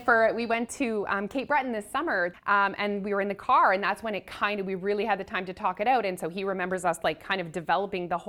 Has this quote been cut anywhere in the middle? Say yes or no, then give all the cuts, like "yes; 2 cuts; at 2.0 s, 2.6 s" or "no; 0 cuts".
yes; 1 cut; at 2.3 s